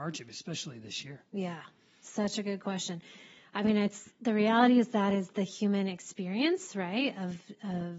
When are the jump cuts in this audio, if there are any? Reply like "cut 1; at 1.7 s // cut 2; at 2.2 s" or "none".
none